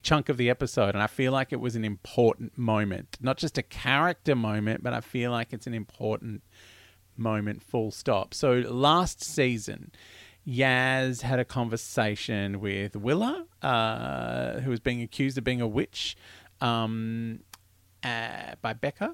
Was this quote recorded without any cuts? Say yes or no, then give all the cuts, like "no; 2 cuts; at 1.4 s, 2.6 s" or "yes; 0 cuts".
yes; 0 cuts